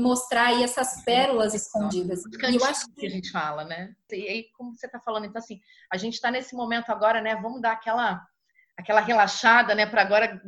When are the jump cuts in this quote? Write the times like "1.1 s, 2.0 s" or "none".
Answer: 4.1 s